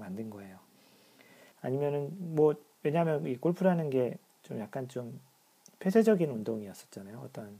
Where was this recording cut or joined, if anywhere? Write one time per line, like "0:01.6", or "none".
0:01.5